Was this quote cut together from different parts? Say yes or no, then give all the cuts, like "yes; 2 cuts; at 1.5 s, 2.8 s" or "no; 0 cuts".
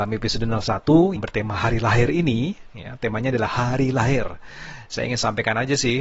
yes; 1 cut; at 1.2 s